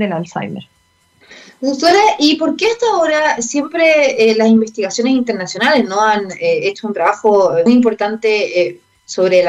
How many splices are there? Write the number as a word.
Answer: one